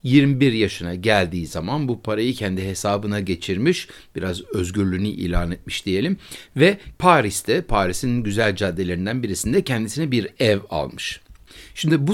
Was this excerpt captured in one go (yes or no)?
yes